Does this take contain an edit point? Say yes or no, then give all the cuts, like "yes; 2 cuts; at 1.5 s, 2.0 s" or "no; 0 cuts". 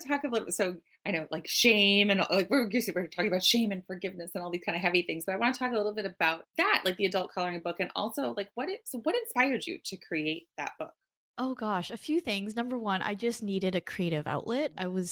no; 0 cuts